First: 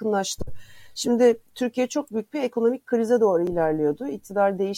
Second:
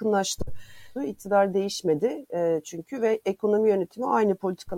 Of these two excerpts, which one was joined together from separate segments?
second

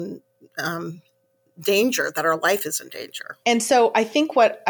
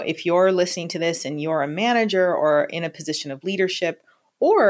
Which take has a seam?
first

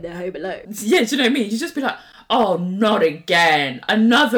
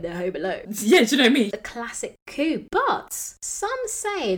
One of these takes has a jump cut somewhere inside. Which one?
second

